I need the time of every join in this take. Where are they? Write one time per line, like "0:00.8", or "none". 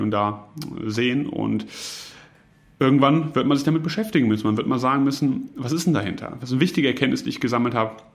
0:06.4

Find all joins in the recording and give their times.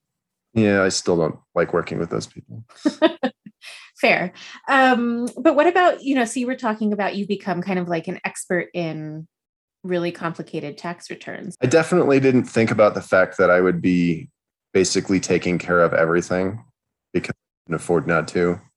0:11.5

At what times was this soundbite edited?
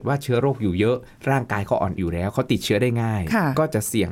0:02.0

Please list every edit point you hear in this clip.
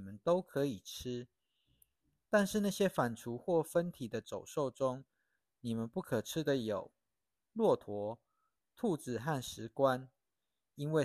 none

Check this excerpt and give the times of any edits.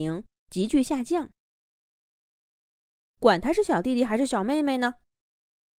none

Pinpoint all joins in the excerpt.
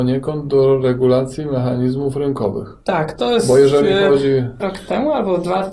0:02.8
0:04.6

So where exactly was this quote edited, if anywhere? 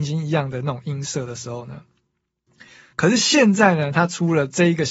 0:02.9

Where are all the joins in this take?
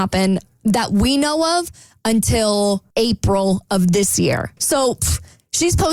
0:02.9
0:04.6

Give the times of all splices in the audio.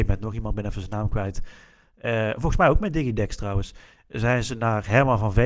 none

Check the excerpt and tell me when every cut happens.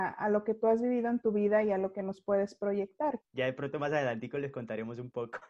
0:03.2

